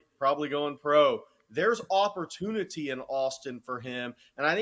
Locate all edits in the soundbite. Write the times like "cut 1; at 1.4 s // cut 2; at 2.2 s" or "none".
none